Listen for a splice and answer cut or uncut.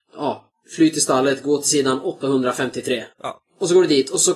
cut